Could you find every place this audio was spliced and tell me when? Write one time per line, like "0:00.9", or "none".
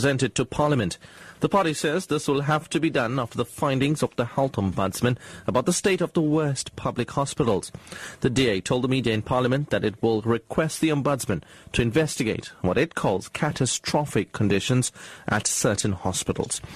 none

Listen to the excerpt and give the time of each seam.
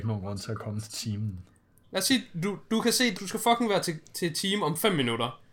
0:01.8
0:03.2

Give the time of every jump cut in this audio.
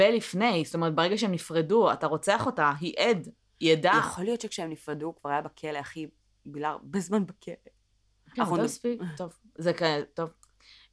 none

